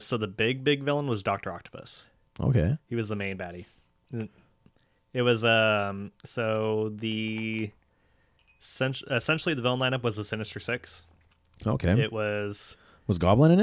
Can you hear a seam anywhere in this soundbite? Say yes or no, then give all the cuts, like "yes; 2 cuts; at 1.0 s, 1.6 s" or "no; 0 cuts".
no; 0 cuts